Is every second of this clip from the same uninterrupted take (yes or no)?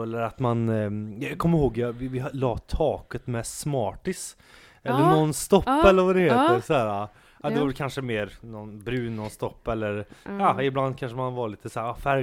yes